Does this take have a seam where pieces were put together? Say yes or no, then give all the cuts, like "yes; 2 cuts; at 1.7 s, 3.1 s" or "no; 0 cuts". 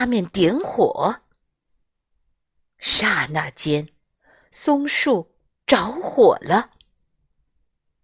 no; 0 cuts